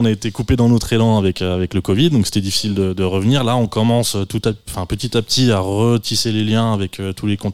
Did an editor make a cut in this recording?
no; 0 cuts

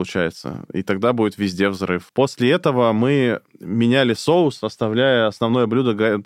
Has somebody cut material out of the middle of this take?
yes; 1 cut; at 2.1 s

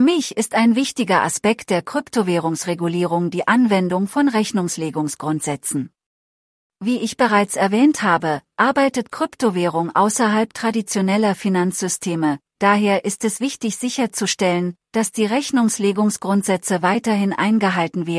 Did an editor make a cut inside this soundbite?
no; 0 cuts

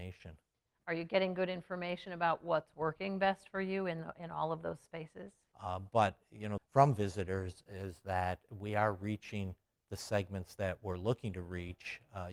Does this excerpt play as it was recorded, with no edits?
no; 2 cuts; at 5.5 s, 6.6 s

